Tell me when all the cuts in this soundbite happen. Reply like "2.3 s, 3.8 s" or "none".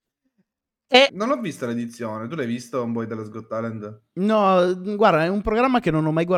1.1 s